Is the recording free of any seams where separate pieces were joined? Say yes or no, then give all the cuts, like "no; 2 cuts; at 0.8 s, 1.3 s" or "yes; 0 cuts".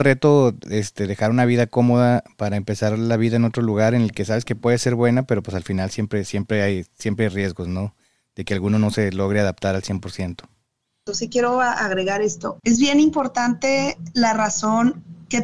no; 2 cuts; at 11.1 s, 12.6 s